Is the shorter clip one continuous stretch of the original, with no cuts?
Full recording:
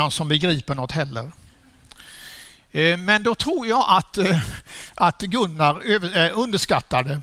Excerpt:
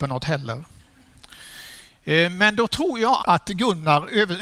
no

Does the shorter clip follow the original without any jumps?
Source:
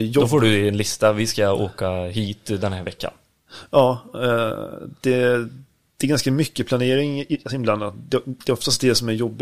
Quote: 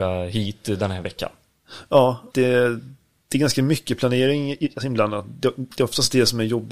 no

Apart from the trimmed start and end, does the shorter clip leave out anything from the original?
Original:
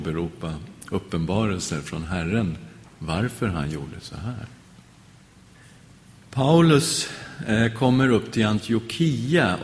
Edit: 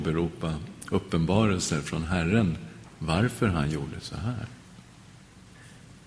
no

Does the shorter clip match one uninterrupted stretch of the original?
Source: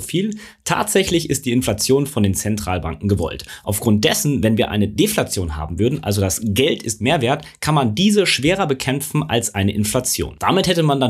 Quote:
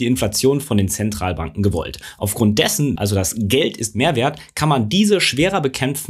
no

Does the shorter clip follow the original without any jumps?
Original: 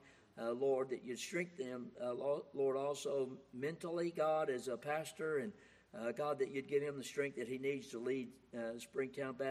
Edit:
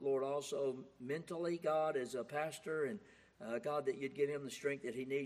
yes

